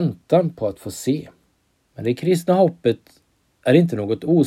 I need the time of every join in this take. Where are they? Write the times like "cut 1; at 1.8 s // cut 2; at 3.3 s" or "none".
cut 1; at 1.9 s